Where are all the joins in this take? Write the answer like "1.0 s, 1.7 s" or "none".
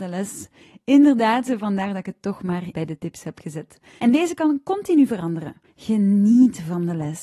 2.7 s, 4.0 s, 5.6 s